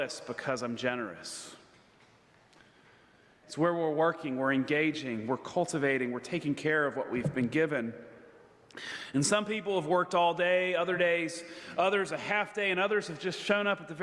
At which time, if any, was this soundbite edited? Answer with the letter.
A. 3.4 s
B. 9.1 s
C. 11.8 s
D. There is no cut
A